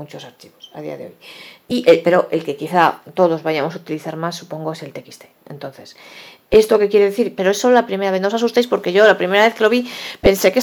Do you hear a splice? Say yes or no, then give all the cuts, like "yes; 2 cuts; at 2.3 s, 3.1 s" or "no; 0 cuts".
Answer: yes; 1 cut; at 7.4 s